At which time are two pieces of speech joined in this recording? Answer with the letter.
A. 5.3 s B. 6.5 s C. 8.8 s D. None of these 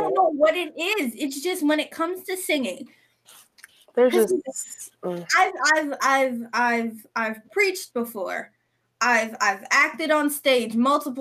D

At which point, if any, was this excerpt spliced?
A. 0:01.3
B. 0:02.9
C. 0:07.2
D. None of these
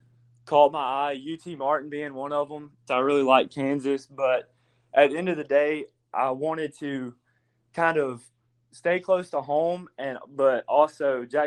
B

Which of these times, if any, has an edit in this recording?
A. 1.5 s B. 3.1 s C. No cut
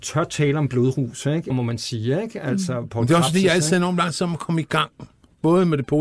A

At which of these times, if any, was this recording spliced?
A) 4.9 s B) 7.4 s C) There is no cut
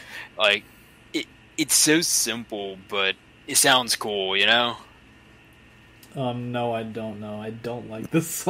C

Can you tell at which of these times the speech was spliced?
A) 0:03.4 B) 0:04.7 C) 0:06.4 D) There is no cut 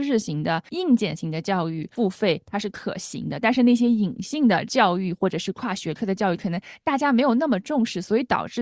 D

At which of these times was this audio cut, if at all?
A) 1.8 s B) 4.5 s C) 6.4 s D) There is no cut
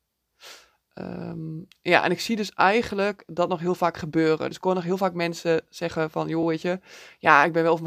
D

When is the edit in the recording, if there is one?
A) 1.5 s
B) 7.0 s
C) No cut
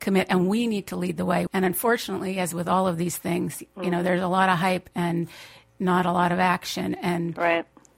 A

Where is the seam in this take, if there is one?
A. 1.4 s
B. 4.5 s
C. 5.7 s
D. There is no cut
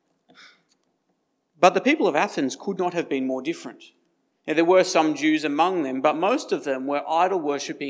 D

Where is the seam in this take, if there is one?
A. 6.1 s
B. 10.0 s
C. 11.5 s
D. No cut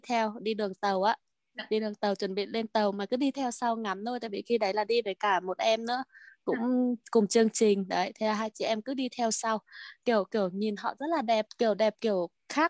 C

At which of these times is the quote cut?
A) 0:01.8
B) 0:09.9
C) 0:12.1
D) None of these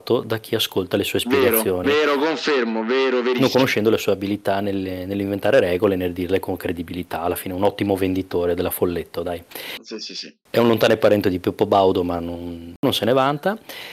D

